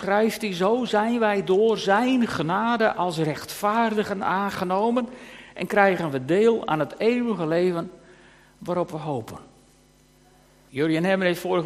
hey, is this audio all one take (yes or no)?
no